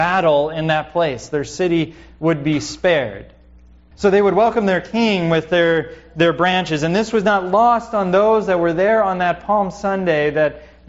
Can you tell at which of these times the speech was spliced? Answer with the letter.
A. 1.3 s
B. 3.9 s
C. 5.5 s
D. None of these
B